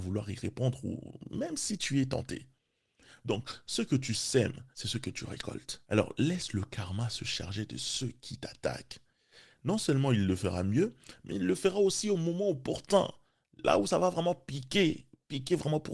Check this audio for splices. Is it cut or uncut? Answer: cut